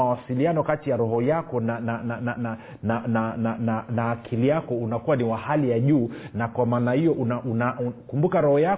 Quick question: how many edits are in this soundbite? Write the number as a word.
zero